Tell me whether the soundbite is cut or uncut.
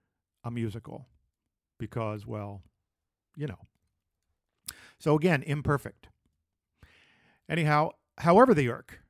uncut